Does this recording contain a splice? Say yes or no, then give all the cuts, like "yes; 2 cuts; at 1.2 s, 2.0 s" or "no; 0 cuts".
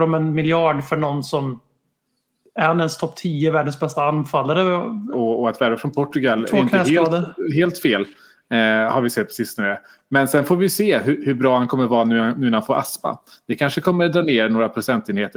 yes; 1 cut; at 5.1 s